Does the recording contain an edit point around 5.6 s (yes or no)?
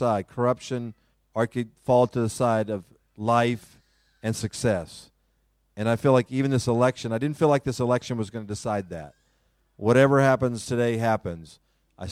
no